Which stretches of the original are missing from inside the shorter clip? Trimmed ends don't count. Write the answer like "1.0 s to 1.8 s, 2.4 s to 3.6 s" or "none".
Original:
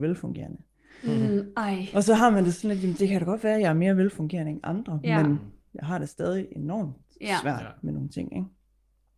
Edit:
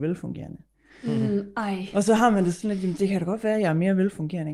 none